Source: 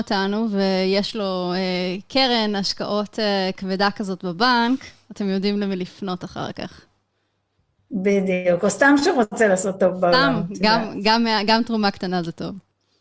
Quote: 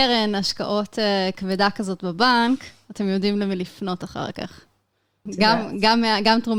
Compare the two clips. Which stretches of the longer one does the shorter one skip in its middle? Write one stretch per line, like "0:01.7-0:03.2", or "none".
0:07.5-0:10.5